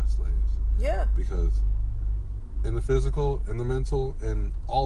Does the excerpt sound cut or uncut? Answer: uncut